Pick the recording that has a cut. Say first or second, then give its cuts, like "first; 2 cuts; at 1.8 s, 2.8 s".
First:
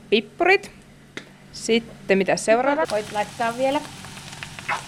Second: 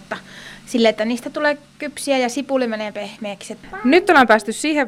first; 1 cut; at 2.8 s